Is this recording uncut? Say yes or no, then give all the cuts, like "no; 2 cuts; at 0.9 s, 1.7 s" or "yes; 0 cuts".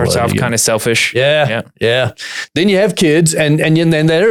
yes; 0 cuts